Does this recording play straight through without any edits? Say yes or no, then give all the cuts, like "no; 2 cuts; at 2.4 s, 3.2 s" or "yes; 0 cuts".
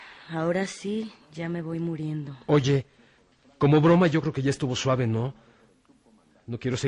yes; 0 cuts